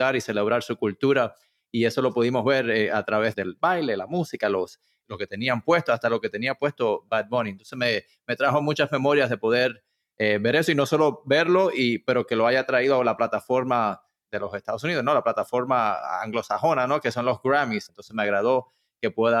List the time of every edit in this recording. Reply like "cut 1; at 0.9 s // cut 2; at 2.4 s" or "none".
cut 1; at 17.9 s